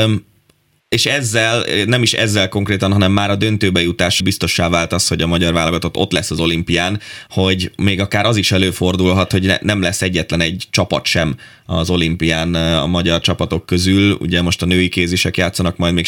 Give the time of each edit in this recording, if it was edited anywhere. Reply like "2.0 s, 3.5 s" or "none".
4.2 s, 7.3 s